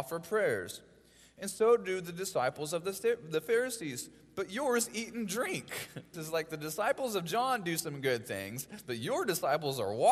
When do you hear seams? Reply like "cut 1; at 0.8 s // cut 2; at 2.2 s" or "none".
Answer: cut 1; at 6.1 s // cut 2; at 8.8 s